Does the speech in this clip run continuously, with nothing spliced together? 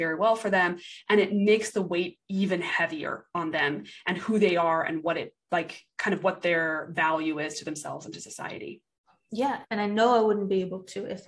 no; 1 cut; at 9.6 s

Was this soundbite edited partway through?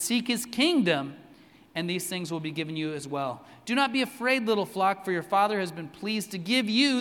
no; 0 cuts

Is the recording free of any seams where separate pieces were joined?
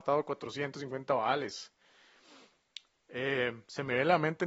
yes; 0 cuts

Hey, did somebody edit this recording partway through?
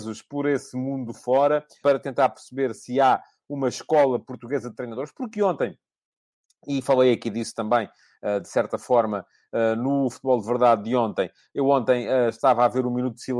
yes; 1 cut; at 1.8 s

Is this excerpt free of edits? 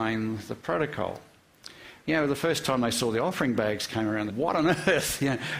no; 2 cuts; at 2.0 s, 4.3 s

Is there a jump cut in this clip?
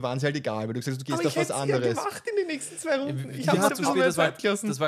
yes; 1 cut; at 3.7 s

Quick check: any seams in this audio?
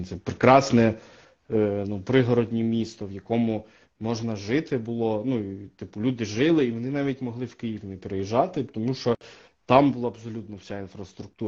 no; 0 cuts

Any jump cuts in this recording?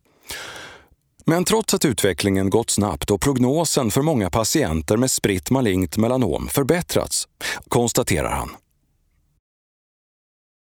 yes; 2 cuts; at 1.2 s, 7.6 s

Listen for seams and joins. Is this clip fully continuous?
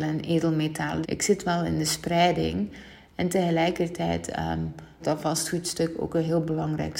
no; 2 cuts; at 1.0 s, 5.0 s

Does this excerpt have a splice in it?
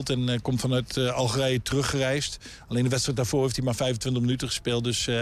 no; 0 cuts

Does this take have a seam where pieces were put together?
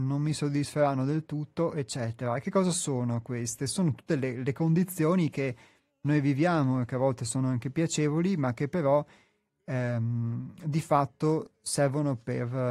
no; 0 cuts

